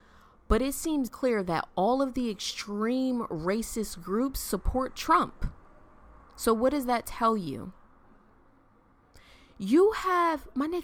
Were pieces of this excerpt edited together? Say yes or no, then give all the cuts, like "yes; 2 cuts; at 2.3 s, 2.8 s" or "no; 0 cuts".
yes; 1 cut; at 1.1 s